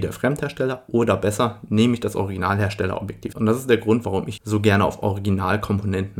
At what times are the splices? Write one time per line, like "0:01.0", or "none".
0:03.3
0:04.4